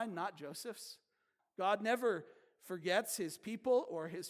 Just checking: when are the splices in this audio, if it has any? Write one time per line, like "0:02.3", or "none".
0:01.4